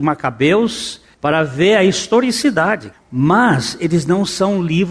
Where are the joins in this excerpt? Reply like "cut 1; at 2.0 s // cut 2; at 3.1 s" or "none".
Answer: cut 1; at 1.1 s // cut 2; at 2.9 s